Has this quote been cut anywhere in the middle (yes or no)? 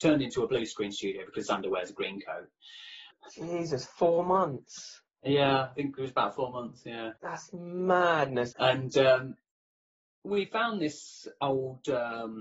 yes